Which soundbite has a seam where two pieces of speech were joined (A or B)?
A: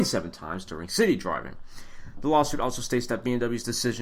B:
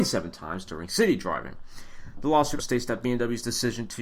B